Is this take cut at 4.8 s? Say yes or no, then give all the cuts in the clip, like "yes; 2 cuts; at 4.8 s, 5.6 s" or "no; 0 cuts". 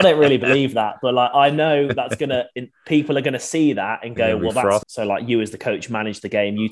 yes; 1 cut; at 4.8 s